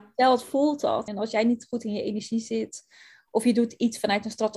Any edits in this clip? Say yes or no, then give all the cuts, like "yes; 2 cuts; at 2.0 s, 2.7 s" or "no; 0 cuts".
yes; 1 cut; at 1.1 s